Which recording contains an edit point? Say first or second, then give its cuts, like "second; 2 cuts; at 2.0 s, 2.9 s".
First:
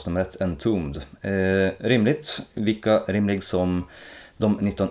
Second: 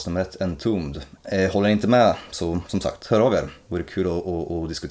second; 1 cut; at 1.2 s